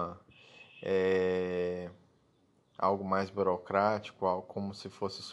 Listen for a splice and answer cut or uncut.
uncut